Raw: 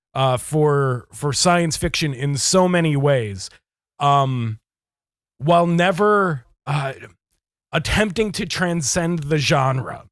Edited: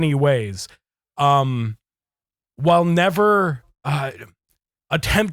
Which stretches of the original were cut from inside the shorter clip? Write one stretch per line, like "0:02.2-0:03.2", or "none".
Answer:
none